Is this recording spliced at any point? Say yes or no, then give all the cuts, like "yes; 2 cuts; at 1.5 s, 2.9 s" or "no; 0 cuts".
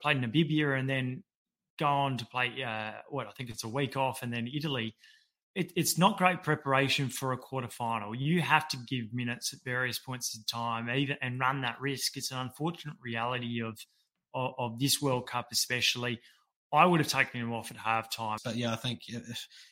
yes; 1 cut; at 18.4 s